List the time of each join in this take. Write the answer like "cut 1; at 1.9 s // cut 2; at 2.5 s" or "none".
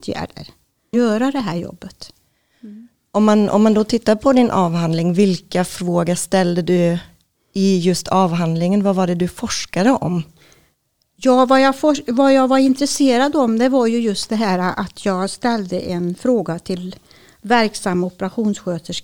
cut 1; at 0.9 s